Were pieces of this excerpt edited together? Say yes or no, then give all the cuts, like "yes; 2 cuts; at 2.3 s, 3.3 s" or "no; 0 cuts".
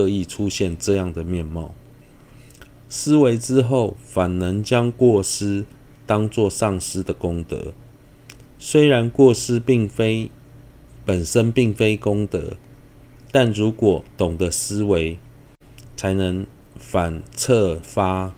no; 0 cuts